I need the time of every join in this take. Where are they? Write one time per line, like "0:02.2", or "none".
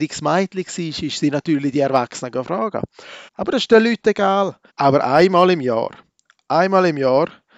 0:03.3
0:04.7